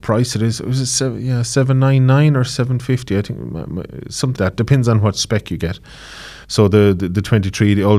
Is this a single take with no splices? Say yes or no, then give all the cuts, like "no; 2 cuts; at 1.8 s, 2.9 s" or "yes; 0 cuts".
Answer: no; 2 cuts; at 4.4 s, 6.4 s